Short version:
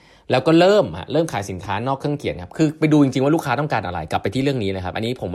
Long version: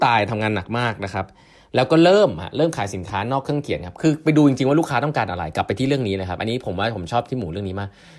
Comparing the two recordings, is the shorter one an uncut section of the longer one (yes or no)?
yes